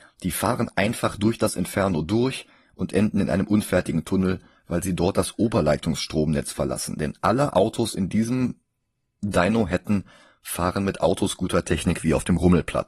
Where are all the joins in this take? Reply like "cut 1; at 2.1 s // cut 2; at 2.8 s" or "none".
none